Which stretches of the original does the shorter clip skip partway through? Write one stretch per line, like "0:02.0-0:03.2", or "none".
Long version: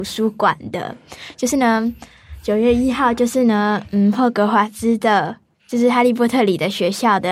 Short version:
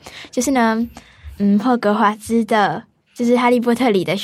0:02.4-0:03.9